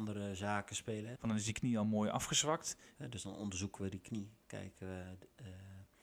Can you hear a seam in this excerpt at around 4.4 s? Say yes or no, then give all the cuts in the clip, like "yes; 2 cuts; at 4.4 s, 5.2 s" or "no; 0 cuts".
no; 2 cuts; at 1.2 s, 3.0 s